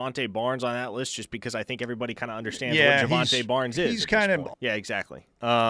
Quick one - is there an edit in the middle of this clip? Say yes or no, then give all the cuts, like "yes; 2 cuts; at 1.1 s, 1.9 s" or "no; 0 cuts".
yes; 1 cut; at 4.5 s